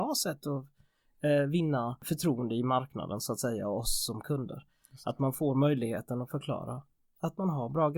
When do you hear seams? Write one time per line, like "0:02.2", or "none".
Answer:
none